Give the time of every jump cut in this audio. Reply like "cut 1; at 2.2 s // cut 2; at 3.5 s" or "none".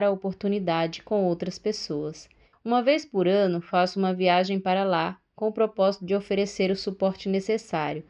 cut 1; at 2.5 s